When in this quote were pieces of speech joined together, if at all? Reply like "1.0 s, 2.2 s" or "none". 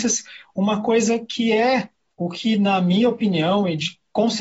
none